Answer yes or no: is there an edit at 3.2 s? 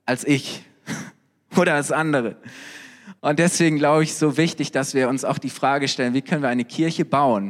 yes